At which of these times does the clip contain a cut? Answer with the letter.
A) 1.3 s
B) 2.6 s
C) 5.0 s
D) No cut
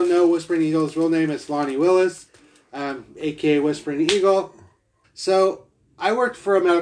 C